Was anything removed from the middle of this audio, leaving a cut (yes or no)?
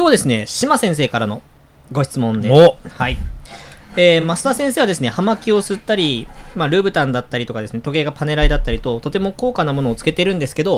no